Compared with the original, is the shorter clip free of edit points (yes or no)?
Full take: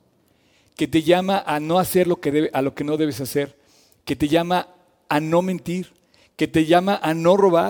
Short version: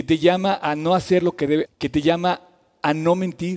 no